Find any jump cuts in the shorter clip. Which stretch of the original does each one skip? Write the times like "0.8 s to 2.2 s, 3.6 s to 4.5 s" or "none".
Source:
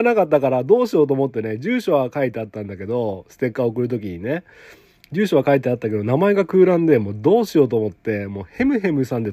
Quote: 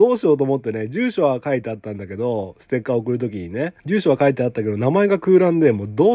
4.5 s to 5.1 s